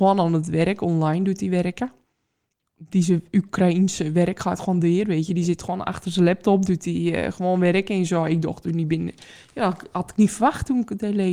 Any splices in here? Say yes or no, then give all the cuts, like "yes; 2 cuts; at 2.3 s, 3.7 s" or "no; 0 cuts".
no; 0 cuts